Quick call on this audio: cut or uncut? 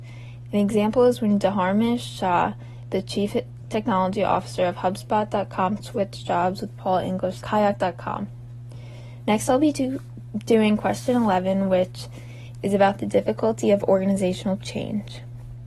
cut